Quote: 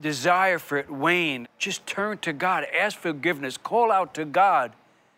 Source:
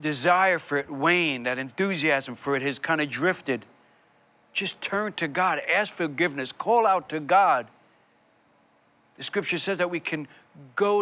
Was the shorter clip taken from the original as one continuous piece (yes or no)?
no